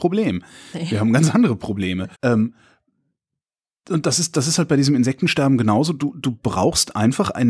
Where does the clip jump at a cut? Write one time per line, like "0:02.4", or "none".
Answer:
0:02.1